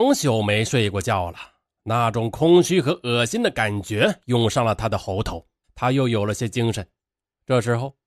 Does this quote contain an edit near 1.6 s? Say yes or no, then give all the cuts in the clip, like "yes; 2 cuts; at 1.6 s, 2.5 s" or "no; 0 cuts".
no; 1 cut; at 5.6 s